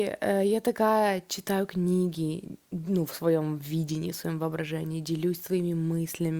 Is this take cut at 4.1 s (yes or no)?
no